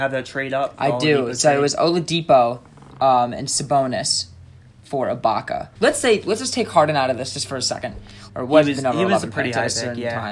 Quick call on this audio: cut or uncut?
cut